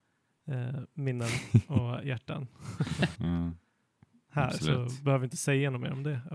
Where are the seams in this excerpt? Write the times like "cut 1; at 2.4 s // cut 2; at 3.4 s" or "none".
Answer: cut 1; at 3.1 s